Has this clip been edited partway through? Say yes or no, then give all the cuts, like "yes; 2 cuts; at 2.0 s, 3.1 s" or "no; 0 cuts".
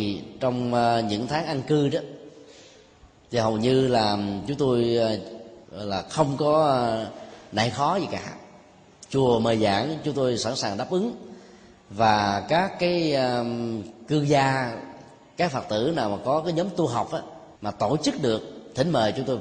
yes; 2 cuts; at 5.6 s, 17.5 s